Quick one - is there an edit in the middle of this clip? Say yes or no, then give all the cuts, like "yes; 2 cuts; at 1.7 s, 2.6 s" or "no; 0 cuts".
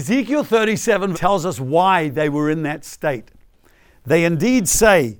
yes; 1 cut; at 1.1 s